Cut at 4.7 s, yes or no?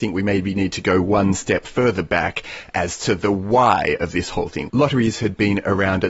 yes